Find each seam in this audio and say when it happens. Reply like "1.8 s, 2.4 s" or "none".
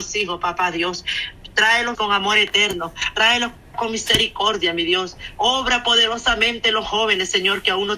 1.9 s, 5.3 s